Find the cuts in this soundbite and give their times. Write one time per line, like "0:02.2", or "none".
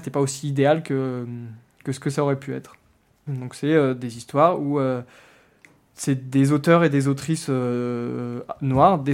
0:03.3